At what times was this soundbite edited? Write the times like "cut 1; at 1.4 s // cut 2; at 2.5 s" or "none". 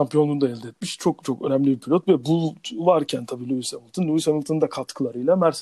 none